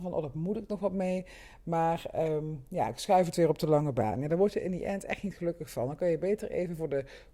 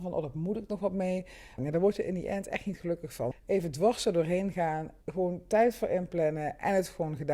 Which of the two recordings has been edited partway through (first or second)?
second